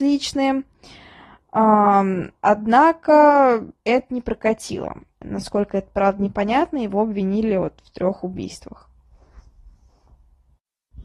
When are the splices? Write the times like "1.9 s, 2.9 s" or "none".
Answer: 3.8 s, 5.2 s